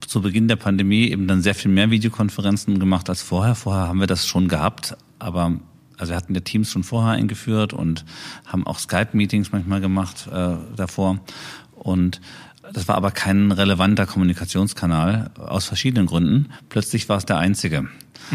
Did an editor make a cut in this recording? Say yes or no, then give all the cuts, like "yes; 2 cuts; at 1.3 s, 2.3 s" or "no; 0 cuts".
no; 0 cuts